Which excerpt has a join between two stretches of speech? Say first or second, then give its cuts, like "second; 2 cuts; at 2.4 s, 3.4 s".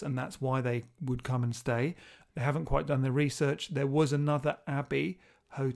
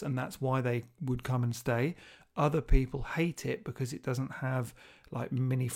first; 1 cut; at 2.3 s